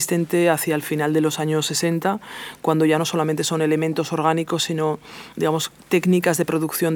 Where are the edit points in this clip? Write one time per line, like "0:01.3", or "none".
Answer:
none